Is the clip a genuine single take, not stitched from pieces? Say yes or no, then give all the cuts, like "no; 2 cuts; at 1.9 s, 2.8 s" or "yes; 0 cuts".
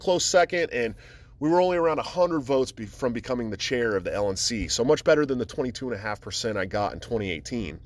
yes; 0 cuts